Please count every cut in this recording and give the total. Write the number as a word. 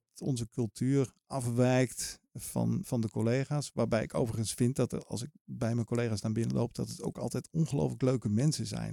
one